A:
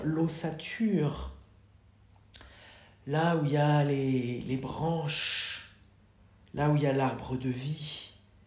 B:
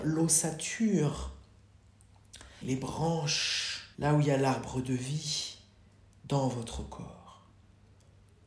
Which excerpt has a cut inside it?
B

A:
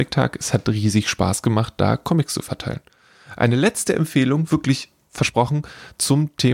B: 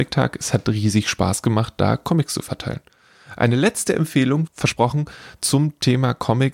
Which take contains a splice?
B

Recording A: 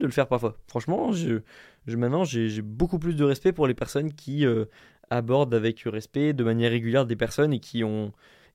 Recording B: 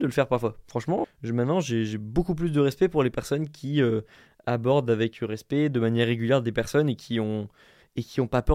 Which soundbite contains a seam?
B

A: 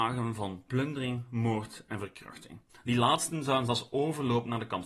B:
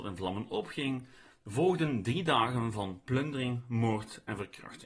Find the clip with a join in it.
A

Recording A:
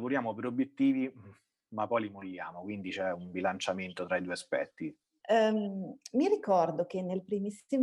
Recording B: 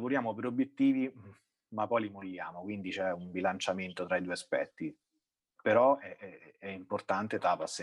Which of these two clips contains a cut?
A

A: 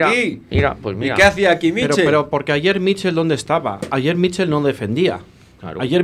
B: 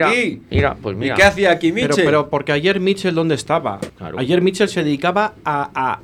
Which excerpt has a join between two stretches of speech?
B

